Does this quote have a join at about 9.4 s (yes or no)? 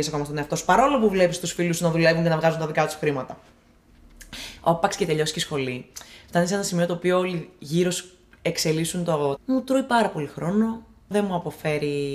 yes